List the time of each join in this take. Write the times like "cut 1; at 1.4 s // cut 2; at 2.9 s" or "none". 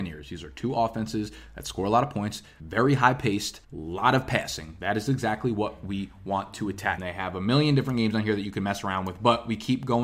none